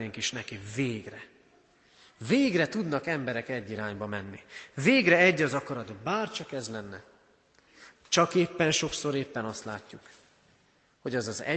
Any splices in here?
yes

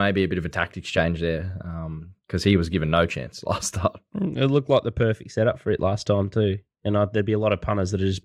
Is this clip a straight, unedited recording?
yes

